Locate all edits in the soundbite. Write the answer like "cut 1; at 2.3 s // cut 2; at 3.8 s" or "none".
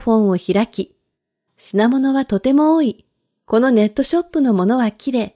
cut 1; at 1.5 s